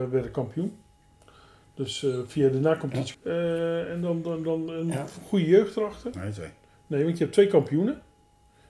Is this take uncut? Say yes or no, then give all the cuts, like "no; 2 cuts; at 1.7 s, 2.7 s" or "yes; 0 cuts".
no; 2 cuts; at 3.1 s, 6.1 s